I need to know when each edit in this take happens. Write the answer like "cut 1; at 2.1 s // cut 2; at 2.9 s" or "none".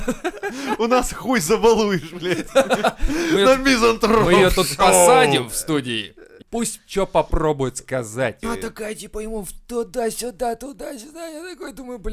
cut 1; at 6.4 s // cut 2; at 8.4 s